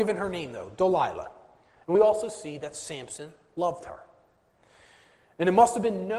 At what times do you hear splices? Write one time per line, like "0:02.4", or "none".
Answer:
none

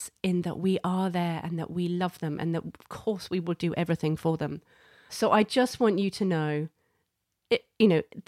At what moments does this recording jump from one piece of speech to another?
0:05.1

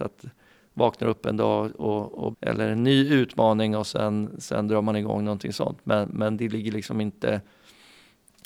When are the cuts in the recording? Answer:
0:02.3

